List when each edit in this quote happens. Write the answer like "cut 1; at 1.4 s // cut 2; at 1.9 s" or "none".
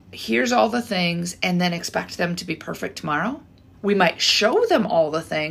cut 1; at 3.7 s